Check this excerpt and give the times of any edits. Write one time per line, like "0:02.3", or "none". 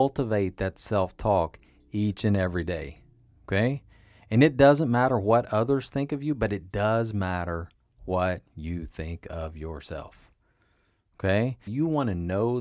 0:11.7